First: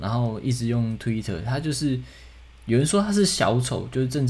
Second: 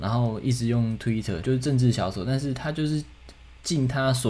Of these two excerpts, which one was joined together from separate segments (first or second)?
second